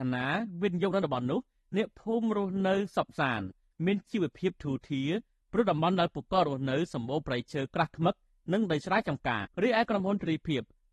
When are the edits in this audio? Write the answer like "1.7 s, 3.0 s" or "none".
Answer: 9.4 s